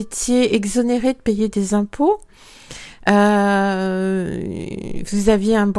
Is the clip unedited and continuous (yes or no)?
yes